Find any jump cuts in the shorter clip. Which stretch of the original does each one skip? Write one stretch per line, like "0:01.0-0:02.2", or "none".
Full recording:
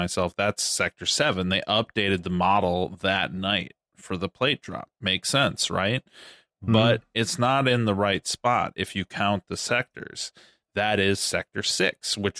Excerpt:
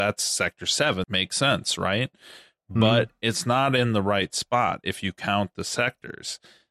0:01.4-0:05.0